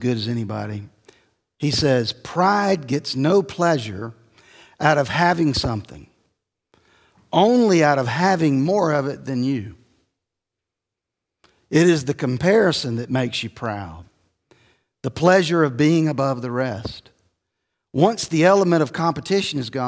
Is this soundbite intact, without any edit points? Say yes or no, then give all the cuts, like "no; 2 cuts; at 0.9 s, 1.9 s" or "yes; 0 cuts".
yes; 0 cuts